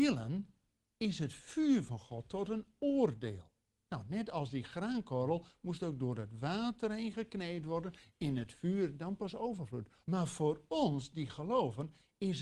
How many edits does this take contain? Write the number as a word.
two